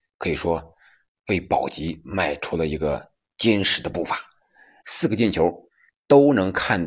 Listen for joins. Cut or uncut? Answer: cut